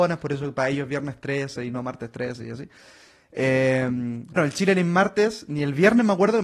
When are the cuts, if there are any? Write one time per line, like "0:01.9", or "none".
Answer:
0:04.4